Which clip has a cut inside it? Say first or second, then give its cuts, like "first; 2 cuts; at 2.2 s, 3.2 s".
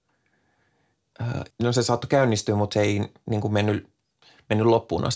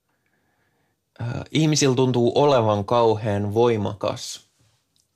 first; 1 cut; at 1.5 s